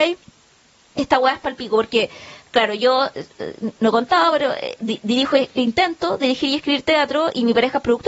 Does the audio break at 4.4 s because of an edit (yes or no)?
no